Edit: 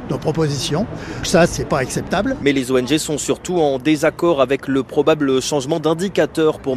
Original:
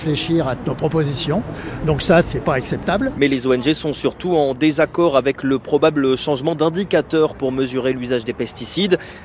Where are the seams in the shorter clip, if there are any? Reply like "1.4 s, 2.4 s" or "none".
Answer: 1.2 s

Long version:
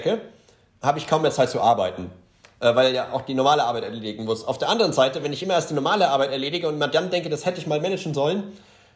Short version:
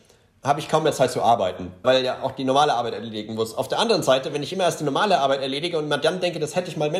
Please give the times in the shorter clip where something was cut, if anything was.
1.8 s

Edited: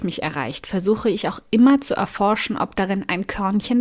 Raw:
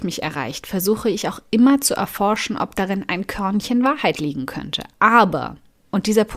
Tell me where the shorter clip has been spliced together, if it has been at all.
none

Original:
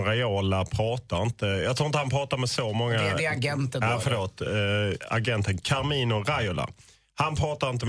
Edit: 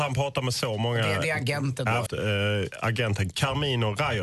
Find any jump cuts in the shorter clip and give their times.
2.1 s

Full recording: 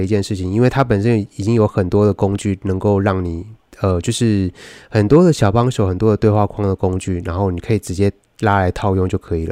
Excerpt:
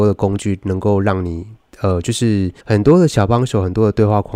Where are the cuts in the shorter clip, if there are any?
2.6 s

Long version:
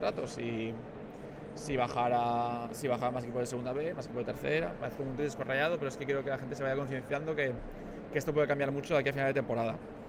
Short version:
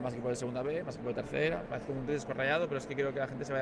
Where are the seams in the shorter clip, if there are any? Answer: none

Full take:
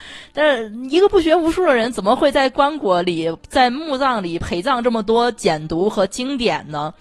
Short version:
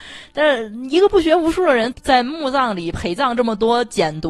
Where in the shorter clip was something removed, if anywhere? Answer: 1.9 s

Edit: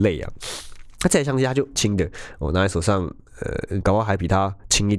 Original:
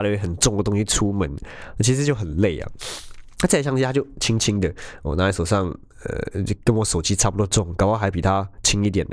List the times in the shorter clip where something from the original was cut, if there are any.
1.8 s, 3.8 s

